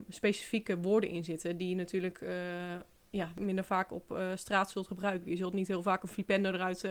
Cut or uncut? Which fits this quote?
uncut